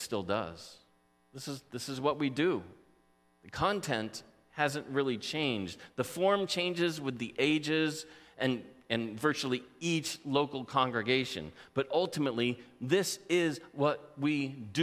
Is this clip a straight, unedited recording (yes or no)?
yes